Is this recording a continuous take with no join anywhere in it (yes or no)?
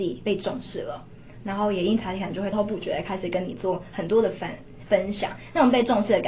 no